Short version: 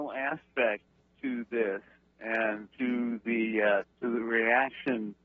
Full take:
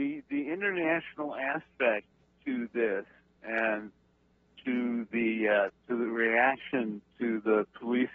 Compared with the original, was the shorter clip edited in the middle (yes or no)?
yes